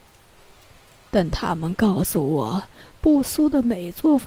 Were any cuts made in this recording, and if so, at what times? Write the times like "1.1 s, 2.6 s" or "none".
none